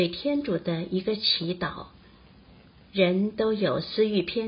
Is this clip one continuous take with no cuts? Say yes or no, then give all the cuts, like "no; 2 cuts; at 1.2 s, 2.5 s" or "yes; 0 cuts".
no; 1 cut; at 2.9 s